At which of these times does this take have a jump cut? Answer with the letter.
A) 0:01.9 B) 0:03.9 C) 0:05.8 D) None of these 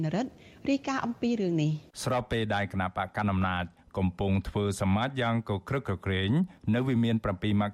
A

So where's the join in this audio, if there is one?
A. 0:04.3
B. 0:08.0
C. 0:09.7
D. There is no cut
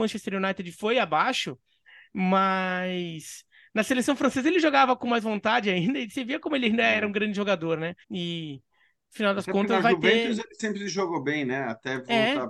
B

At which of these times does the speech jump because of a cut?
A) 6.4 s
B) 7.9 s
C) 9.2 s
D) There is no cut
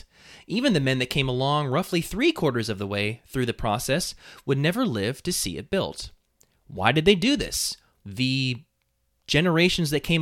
B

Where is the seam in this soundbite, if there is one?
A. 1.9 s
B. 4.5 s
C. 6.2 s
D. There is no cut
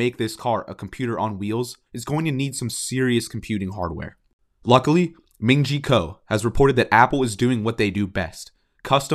A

